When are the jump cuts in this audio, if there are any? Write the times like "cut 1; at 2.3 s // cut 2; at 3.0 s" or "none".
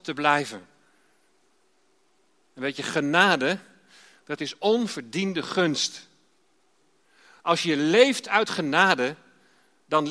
none